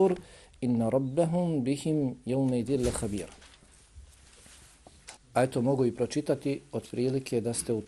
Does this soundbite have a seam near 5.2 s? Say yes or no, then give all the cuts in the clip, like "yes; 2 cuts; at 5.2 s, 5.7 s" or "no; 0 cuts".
yes; 1 cut; at 5.2 s